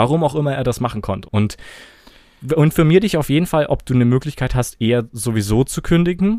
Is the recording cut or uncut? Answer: cut